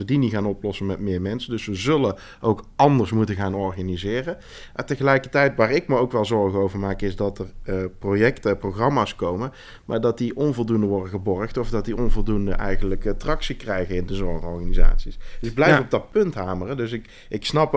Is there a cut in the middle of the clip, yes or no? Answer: no